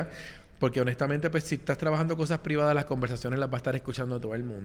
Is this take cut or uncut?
uncut